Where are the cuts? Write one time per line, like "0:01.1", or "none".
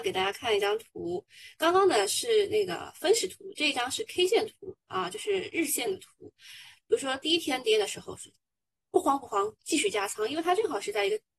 none